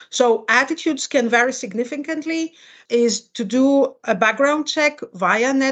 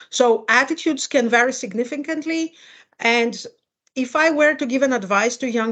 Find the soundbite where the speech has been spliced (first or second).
first